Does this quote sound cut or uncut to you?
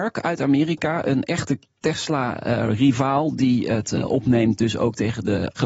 uncut